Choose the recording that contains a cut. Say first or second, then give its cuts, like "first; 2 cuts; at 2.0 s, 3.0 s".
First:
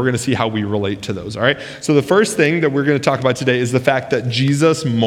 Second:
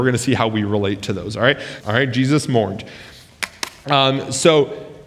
second; 1 cut; at 1.8 s